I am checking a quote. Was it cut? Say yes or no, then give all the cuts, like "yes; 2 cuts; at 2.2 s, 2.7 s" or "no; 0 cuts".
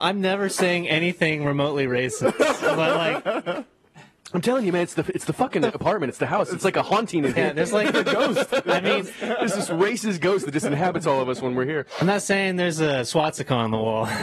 no; 0 cuts